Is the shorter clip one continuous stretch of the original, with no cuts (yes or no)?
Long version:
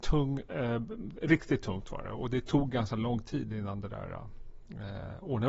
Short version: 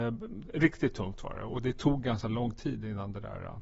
yes